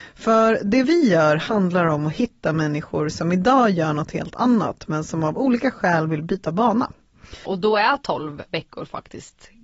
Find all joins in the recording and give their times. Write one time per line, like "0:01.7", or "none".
0:07.5